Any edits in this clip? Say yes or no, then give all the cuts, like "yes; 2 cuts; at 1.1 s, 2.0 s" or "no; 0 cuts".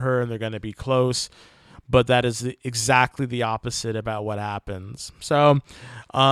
no; 0 cuts